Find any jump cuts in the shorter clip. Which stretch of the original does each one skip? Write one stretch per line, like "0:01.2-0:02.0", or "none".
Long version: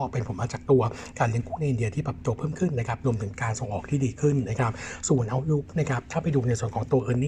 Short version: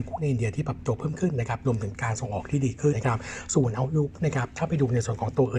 0:04.3-0:04.5